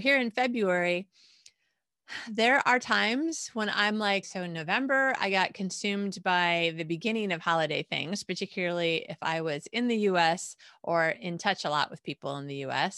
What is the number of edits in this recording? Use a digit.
1